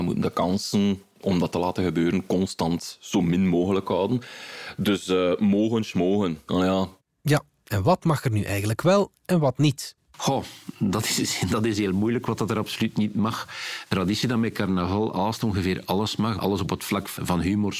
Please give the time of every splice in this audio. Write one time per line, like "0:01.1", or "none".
none